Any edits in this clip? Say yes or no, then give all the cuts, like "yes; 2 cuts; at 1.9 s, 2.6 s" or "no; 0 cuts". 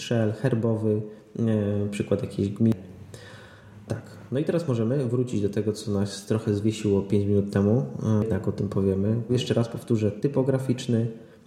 yes; 1 cut; at 9.3 s